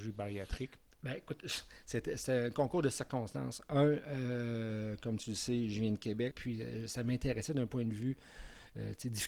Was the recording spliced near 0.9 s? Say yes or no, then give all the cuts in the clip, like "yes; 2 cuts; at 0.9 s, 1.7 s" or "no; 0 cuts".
no; 1 cut; at 6.3 s